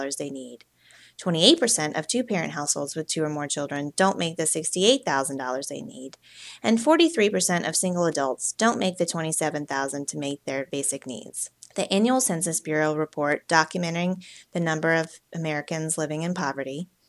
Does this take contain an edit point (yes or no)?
yes